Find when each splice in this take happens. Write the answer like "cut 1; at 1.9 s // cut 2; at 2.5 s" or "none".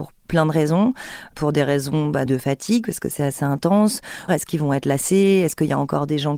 cut 1; at 2.3 s // cut 2; at 4.3 s